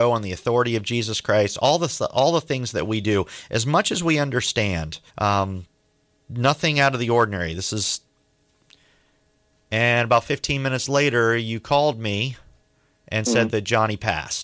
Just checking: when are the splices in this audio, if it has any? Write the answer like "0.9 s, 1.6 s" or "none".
5.1 s